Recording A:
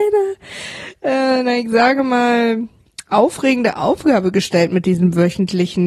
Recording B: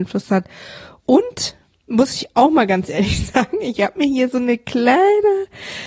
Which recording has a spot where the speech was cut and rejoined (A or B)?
B